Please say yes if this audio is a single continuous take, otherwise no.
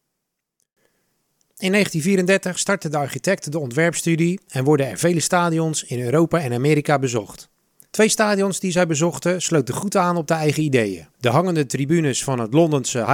no